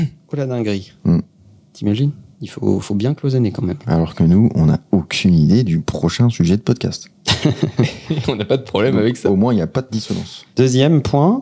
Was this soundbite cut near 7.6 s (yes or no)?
no